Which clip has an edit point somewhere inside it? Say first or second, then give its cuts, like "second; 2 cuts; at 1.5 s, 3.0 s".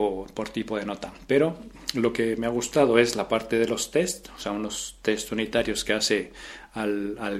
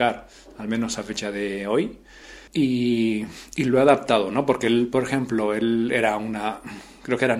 second; 1 cut; at 2.5 s